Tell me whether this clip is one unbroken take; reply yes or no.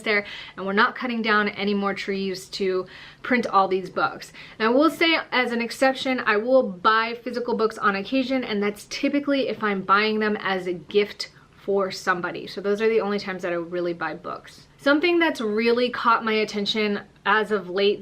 no